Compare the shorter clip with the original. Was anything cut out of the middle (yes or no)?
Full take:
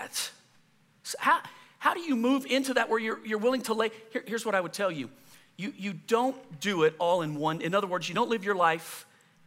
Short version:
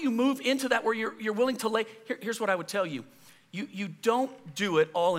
no